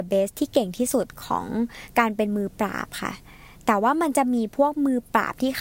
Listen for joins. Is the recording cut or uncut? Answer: uncut